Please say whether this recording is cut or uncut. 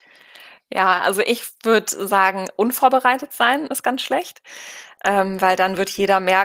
uncut